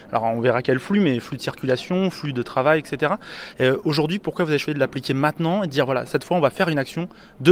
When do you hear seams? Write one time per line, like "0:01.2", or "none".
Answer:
0:03.5